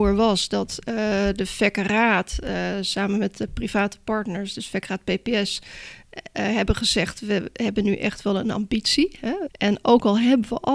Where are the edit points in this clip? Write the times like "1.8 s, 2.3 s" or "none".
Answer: 9.5 s